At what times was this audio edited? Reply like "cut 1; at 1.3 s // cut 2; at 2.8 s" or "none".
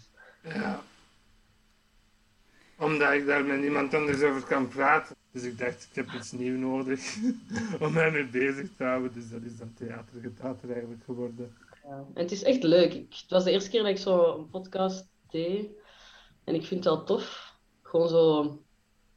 cut 1; at 5.1 s